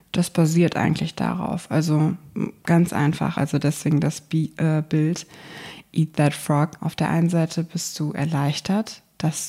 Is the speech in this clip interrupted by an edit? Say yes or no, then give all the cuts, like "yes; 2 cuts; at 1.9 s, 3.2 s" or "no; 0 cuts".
yes; 2 cuts; at 3.4 s, 6.8 s